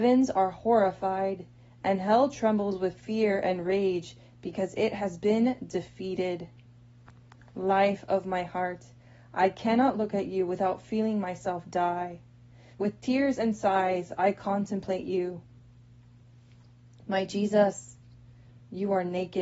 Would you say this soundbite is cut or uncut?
cut